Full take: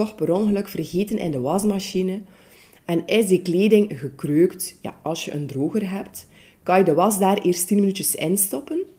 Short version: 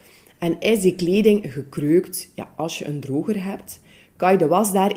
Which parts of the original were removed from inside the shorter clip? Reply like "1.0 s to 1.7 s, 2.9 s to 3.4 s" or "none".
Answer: none